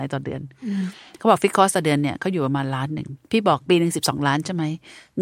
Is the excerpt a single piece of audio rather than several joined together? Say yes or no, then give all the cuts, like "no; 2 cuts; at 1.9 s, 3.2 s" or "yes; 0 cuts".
no; 1 cut; at 3.2 s